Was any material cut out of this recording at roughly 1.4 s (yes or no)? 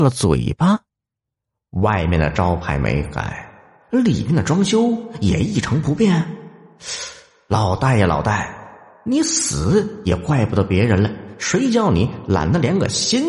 no